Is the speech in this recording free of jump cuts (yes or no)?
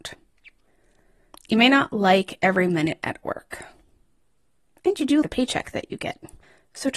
no